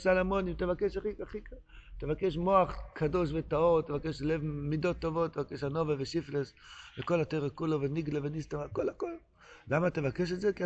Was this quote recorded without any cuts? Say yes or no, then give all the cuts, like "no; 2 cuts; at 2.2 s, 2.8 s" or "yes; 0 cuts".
yes; 0 cuts